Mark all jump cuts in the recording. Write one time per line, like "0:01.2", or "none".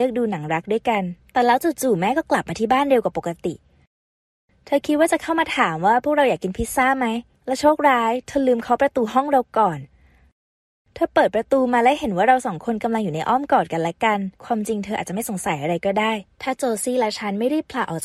0:14.4
0:16.3